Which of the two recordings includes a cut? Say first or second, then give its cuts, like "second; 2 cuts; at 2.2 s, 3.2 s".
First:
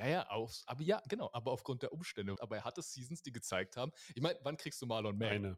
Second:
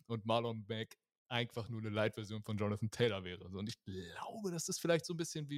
first; 1 cut; at 2.4 s